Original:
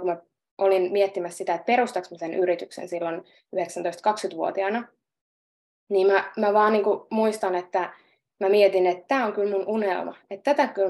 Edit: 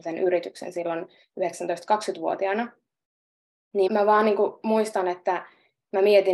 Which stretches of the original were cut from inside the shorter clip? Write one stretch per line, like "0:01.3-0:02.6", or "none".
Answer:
0:06.0-0:06.3